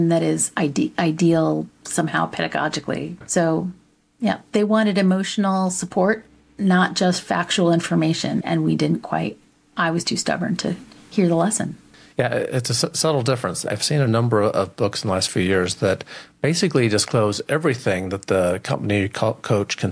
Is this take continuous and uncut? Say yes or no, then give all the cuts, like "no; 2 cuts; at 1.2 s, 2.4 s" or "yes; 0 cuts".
yes; 0 cuts